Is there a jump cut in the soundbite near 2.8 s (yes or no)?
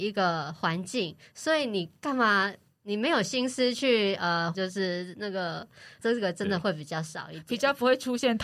no